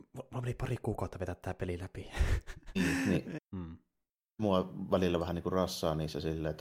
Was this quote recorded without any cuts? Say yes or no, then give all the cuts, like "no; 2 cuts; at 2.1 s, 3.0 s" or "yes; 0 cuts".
no; 1 cut; at 3.4 s